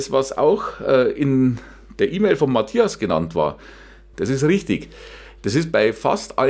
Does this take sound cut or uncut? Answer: cut